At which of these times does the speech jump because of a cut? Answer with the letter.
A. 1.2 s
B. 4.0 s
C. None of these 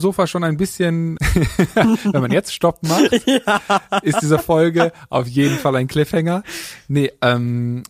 A